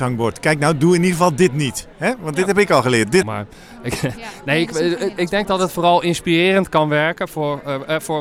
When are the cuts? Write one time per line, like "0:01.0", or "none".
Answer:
0:03.2